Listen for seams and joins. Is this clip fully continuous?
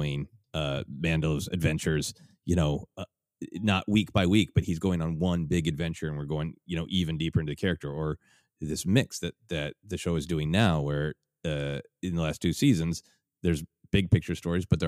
yes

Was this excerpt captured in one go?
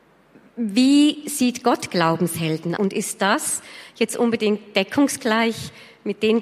no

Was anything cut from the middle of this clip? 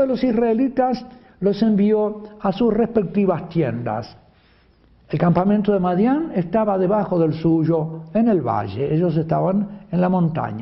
no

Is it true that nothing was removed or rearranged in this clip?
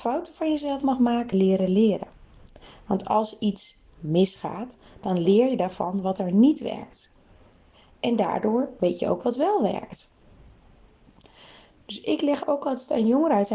no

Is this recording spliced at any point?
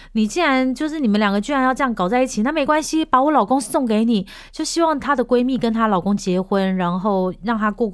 no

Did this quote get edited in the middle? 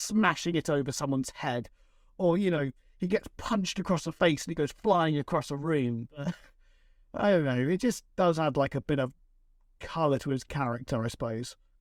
no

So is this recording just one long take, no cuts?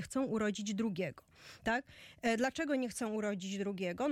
yes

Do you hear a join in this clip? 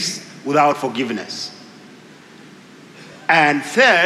no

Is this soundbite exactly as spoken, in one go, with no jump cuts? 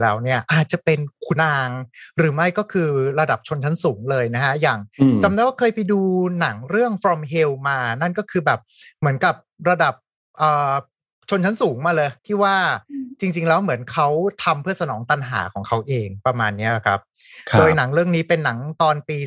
no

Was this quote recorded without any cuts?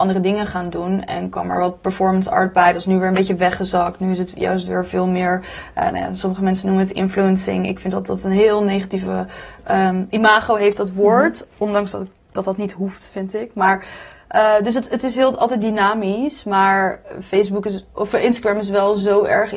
yes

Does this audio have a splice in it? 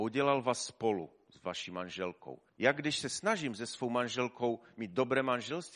yes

